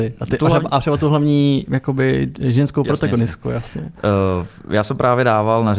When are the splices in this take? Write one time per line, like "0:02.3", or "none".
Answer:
none